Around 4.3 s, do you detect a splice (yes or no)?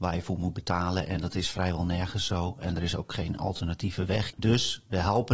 yes